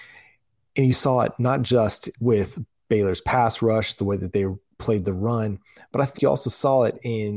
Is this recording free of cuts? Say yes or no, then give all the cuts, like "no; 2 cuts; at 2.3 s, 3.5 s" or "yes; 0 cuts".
no; 1 cut; at 6.2 s